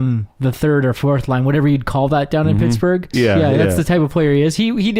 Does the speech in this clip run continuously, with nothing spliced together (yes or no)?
no